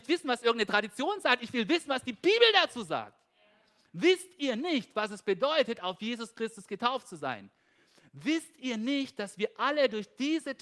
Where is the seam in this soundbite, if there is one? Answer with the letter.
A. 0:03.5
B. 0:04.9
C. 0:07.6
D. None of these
D